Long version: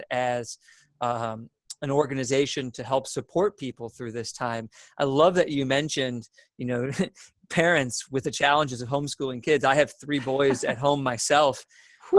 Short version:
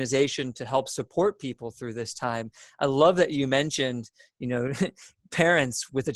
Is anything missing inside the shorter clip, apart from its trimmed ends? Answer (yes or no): no